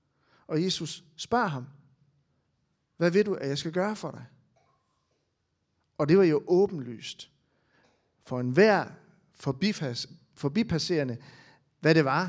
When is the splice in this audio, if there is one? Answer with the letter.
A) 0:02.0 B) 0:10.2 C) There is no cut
C